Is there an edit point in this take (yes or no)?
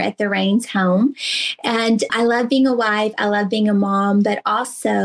yes